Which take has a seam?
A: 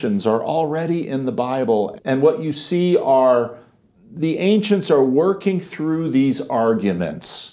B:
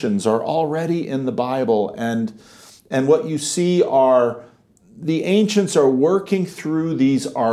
A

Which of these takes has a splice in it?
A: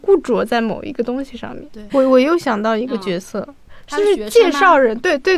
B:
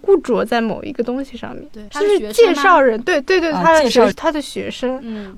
B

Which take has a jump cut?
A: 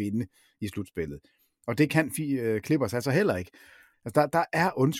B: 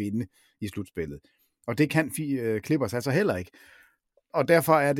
A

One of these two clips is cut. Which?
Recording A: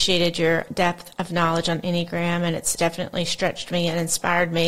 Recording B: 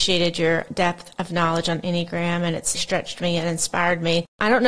B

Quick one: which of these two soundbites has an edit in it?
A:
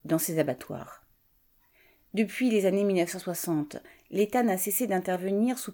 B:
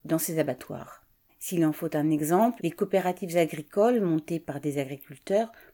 B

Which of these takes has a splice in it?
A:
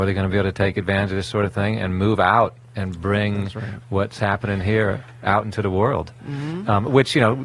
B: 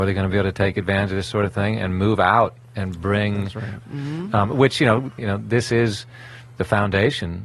B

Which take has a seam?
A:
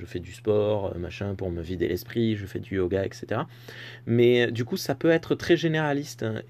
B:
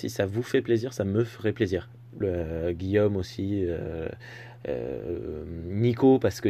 B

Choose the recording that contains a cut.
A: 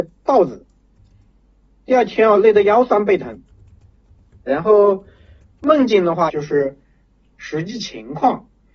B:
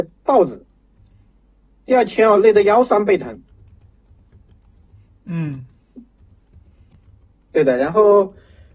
A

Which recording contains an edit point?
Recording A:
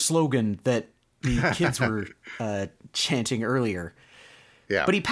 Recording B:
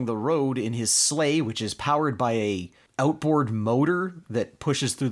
B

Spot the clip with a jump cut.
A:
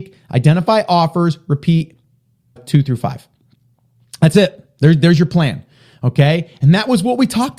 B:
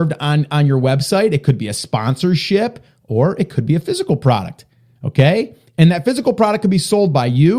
A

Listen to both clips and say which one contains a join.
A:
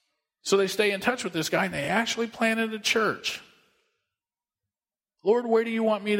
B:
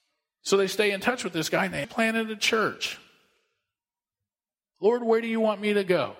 B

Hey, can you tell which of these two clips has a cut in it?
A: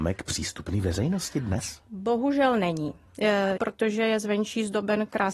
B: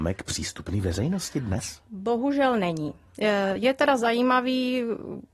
A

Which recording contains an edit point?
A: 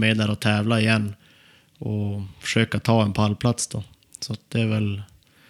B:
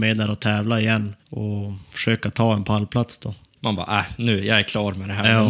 B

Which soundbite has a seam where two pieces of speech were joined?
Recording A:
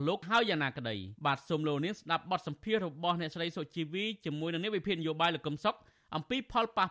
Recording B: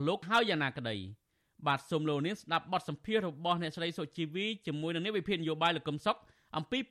A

